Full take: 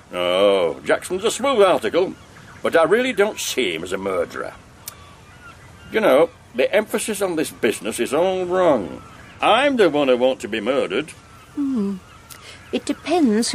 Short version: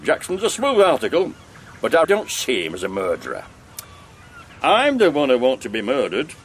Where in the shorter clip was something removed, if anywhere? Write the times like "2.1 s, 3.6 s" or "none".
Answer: 2.0 s, 4.5 s